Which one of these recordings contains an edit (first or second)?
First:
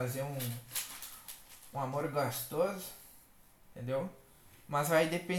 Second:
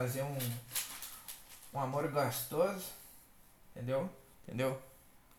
second